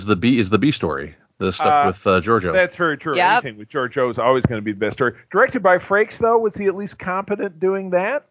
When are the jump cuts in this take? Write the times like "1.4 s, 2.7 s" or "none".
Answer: none